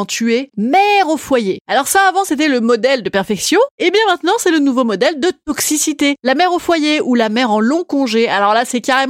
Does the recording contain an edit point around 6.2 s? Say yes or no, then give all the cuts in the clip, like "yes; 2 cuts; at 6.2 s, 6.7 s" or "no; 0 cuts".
no; 0 cuts